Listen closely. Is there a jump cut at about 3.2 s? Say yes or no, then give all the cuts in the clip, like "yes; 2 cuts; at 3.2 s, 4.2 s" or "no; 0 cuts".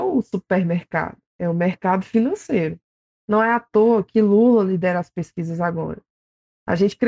yes; 1 cut; at 3.2 s